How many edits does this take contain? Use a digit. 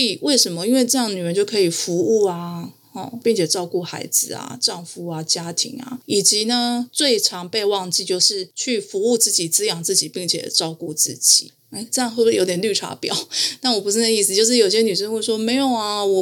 2